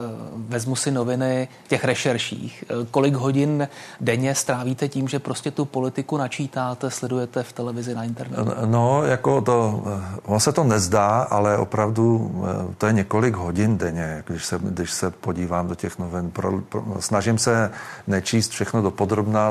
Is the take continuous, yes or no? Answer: no